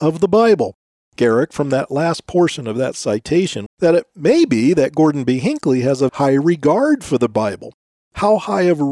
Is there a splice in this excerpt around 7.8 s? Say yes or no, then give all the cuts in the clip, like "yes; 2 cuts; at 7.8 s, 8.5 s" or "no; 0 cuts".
no; 3 cuts; at 1.2 s, 3.7 s, 6.1 s